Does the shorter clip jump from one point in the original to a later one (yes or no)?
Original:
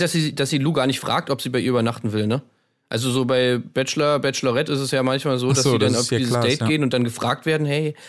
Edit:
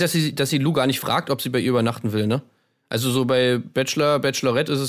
no